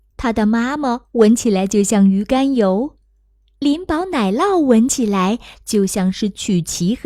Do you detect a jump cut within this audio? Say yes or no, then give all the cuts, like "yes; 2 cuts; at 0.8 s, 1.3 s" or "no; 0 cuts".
no; 0 cuts